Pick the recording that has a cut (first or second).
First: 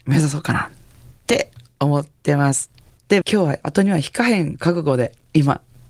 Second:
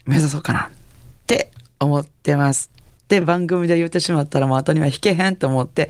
first